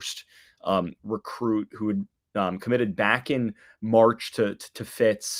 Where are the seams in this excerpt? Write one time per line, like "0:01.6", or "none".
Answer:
none